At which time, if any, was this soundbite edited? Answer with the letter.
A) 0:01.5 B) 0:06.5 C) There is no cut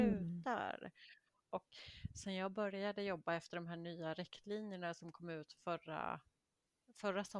A